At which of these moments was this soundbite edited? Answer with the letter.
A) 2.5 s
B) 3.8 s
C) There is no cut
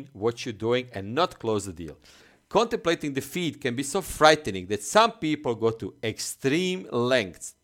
C